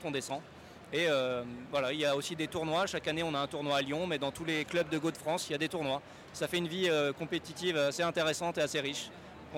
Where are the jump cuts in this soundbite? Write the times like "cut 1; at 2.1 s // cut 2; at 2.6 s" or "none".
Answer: none